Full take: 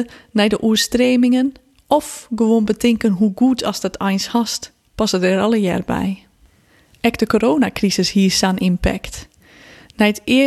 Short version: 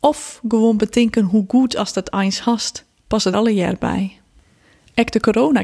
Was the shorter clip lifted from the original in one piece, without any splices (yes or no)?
no